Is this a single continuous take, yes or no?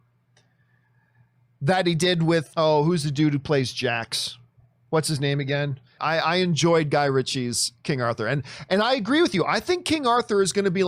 no